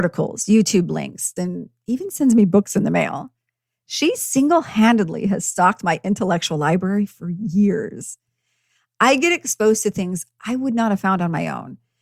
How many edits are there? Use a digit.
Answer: 1